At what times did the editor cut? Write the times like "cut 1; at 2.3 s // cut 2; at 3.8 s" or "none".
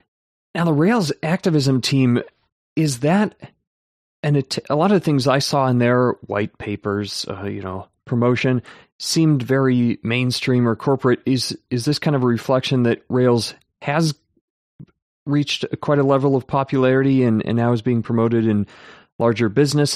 none